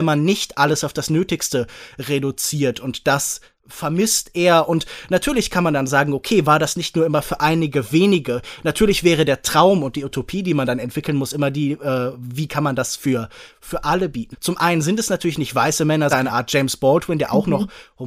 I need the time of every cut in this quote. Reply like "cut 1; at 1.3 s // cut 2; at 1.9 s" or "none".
cut 1; at 14.3 s // cut 2; at 16.1 s

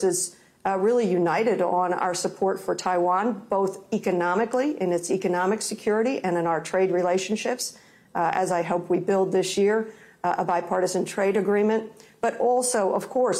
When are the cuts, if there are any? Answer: none

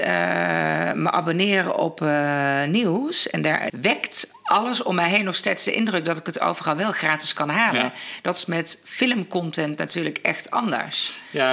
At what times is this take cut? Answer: cut 1; at 3.7 s

